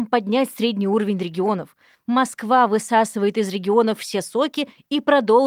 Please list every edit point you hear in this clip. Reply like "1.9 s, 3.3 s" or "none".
none